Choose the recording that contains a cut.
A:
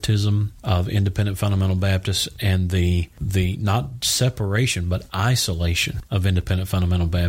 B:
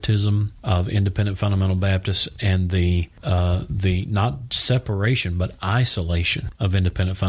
A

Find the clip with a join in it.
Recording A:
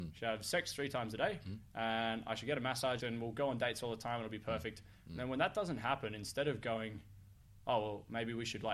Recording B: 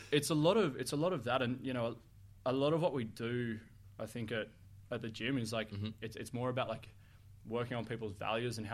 A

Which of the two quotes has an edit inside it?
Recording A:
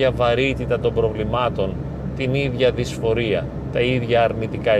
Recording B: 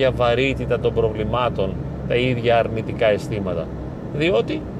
B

